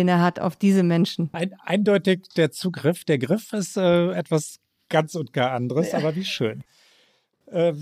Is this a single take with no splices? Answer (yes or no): no